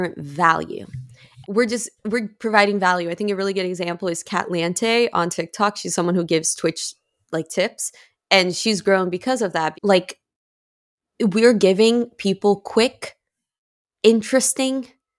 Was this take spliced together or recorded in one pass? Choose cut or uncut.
cut